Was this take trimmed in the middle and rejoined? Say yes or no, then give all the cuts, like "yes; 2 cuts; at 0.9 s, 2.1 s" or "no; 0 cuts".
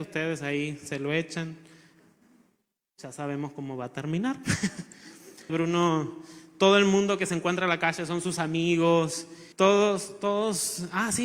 yes; 2 cuts; at 5.5 s, 9.5 s